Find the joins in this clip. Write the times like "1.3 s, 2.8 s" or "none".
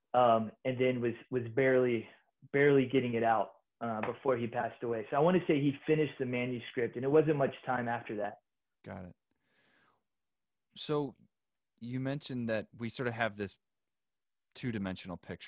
8.7 s, 12.7 s